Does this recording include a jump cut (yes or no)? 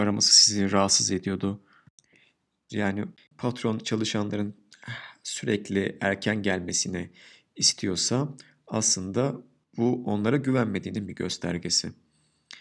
yes